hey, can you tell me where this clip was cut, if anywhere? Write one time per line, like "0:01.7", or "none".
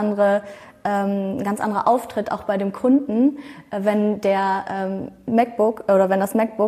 none